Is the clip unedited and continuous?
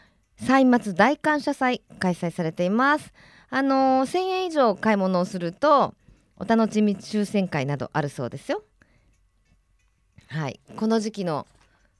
yes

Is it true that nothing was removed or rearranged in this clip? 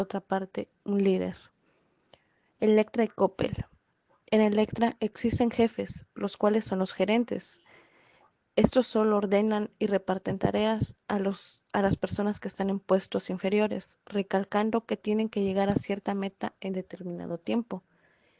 yes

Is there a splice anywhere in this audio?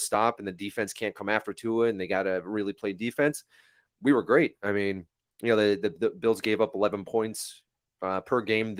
no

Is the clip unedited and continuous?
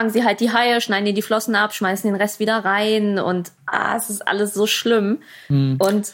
yes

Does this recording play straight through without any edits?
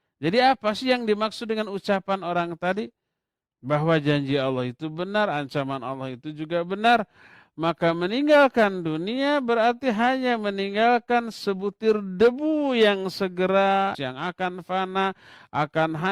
no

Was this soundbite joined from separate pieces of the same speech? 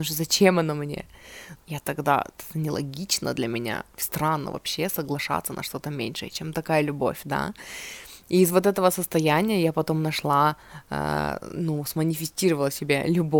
yes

